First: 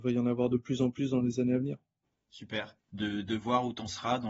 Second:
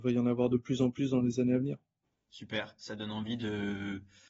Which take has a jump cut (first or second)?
first